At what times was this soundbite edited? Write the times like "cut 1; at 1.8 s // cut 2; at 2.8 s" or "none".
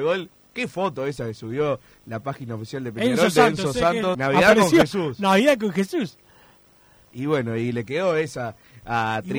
cut 1; at 4.1 s